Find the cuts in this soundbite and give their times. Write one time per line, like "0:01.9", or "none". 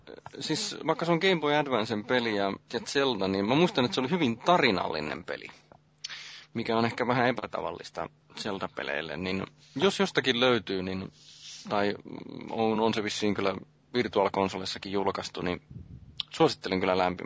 none